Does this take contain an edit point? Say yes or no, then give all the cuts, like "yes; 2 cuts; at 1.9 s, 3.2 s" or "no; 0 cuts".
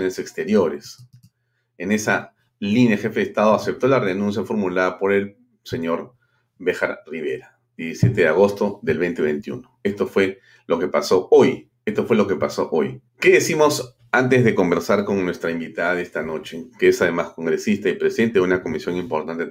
yes; 2 cuts; at 11.8 s, 13.1 s